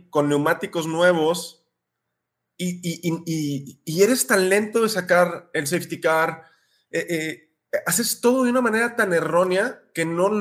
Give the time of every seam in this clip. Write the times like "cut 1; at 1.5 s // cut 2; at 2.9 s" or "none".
none